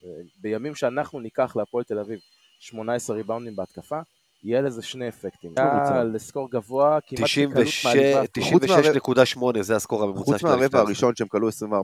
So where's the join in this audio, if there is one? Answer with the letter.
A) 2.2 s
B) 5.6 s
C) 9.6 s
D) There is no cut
B